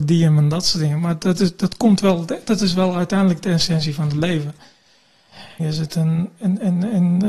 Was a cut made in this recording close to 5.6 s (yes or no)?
yes